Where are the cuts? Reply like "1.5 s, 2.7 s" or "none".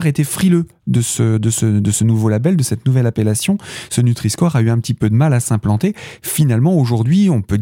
none